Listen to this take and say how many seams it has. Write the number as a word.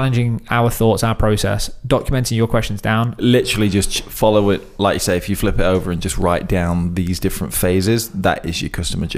one